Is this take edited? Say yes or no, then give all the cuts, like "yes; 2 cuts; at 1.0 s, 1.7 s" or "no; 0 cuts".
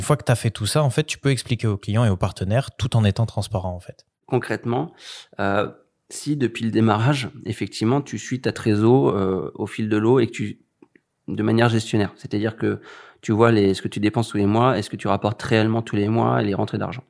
no; 0 cuts